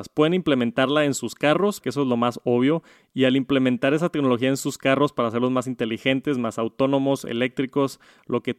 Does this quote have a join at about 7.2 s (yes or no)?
no